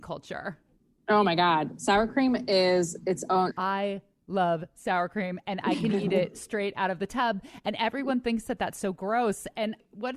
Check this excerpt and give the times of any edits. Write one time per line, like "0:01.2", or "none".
0:03.5